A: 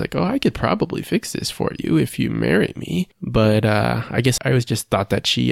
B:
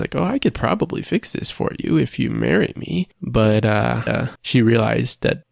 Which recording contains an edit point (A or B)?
B